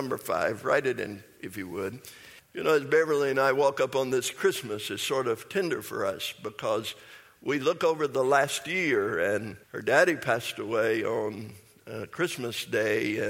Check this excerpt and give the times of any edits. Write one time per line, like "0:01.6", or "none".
0:02.4
0:09.6